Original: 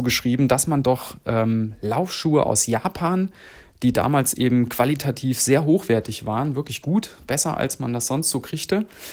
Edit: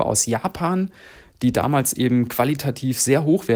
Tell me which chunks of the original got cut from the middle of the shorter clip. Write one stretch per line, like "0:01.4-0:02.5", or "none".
none